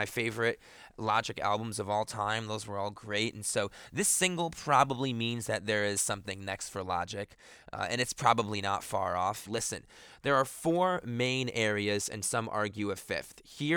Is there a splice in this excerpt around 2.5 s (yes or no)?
no